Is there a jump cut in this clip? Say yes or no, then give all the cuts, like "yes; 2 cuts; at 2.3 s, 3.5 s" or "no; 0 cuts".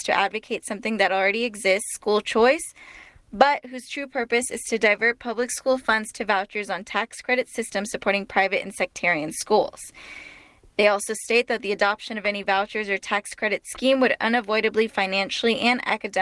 no; 0 cuts